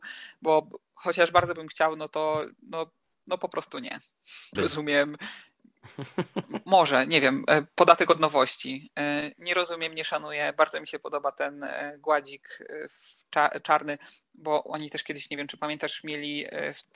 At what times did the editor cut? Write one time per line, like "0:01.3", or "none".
0:04.6